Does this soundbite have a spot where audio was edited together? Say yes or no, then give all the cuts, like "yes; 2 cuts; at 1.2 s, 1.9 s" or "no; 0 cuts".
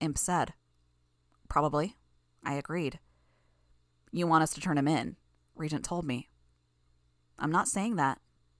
no; 0 cuts